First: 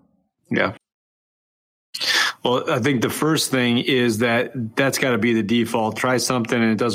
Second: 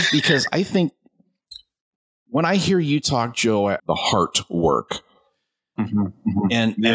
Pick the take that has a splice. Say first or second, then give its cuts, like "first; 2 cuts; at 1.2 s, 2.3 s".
second; 1 cut; at 3.8 s